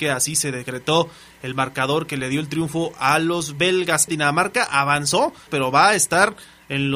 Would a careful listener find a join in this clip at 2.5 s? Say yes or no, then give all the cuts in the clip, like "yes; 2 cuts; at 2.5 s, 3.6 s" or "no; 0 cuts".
no; 2 cuts; at 4.1 s, 5.5 s